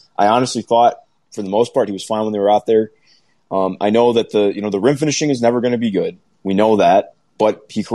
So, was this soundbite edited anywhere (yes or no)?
no